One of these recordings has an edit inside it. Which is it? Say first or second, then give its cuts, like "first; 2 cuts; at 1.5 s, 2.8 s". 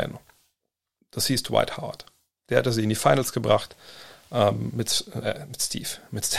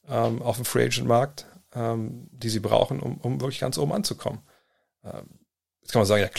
first; 2 cuts; at 1.0 s, 5.2 s